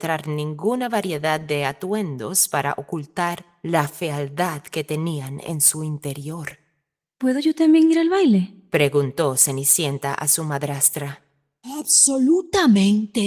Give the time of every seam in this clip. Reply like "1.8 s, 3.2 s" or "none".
none